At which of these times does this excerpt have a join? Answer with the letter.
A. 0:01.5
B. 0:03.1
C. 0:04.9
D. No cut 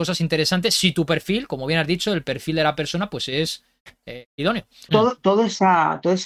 C